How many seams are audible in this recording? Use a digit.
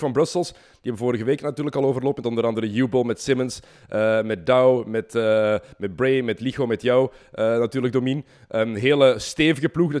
0